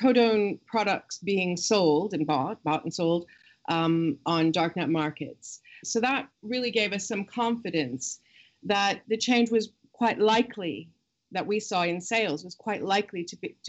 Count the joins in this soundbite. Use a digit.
1